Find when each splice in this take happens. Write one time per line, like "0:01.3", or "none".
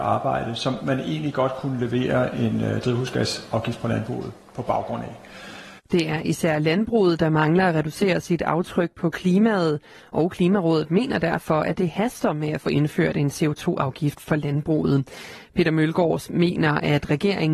0:05.8